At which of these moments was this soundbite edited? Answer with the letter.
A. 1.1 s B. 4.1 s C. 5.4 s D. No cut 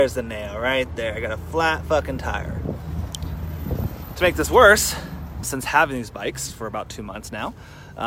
C